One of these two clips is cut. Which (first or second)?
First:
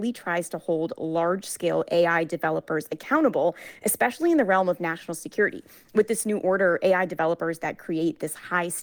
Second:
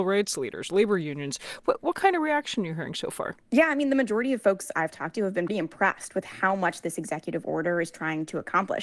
second